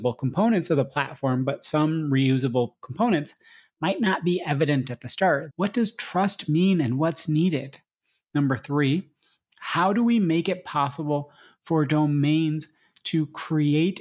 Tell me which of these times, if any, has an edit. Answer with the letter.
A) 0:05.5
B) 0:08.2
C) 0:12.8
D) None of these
A